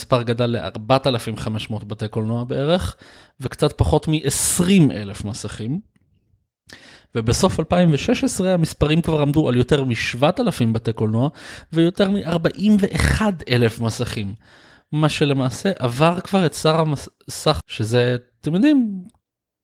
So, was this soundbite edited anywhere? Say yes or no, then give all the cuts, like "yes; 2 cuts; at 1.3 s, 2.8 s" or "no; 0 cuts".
yes; 1 cut; at 17.6 s